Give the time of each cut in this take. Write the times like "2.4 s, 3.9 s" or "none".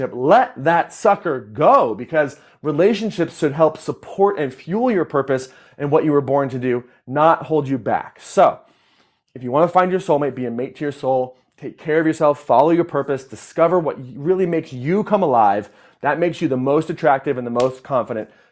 none